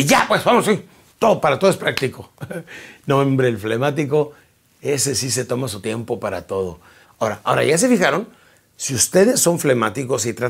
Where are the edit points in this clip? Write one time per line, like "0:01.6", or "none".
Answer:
0:07.0

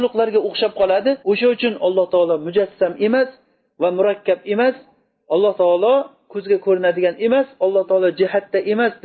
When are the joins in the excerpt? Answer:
0:01.2

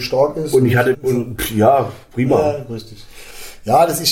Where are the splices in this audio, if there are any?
0:00.9

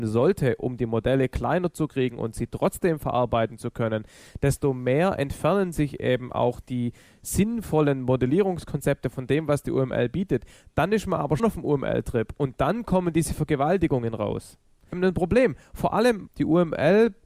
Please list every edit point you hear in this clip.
0:11.4
0:14.9
0:16.3

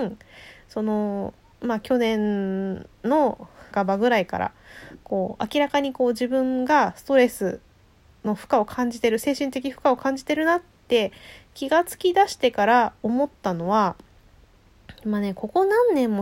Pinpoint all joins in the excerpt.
0:03.7

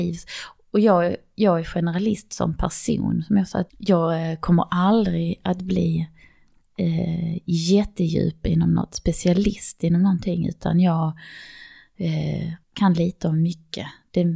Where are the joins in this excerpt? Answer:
0:03.7
0:12.6

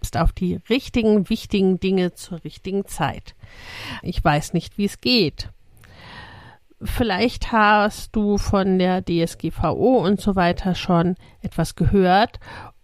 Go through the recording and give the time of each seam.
0:04.0

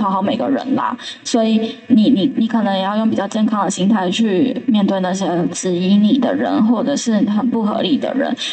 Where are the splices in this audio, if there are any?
none

